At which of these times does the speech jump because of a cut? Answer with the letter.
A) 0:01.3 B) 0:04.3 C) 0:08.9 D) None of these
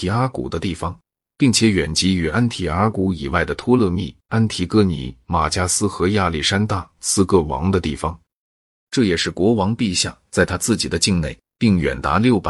C